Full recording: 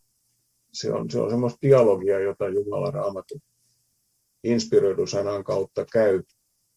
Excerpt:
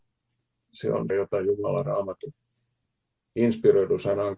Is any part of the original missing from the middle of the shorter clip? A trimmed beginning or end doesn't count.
yes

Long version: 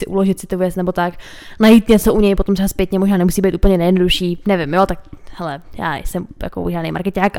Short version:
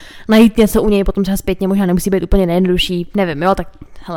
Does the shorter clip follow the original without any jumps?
yes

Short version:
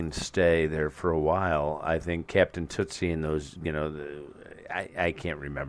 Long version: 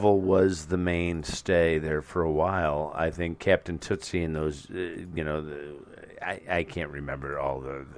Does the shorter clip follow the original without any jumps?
no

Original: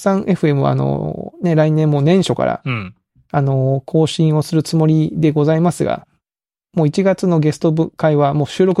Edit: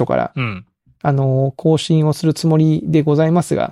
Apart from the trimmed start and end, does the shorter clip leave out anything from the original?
no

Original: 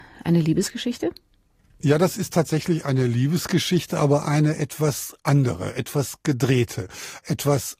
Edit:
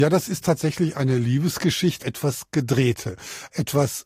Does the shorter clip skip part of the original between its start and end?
yes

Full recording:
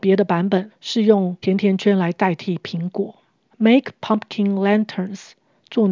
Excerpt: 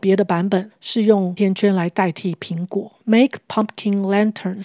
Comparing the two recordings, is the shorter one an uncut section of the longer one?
no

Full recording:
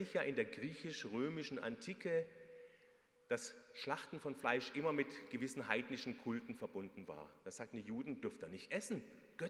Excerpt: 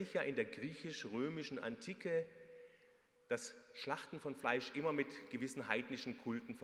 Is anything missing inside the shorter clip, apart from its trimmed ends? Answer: no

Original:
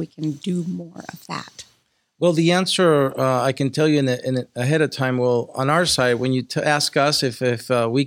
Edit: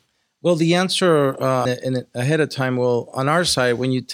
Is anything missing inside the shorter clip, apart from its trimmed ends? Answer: yes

